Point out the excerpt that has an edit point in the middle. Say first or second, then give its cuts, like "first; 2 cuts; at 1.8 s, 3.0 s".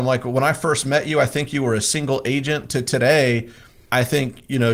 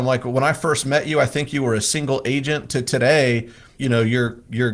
second; 1 cut; at 3.8 s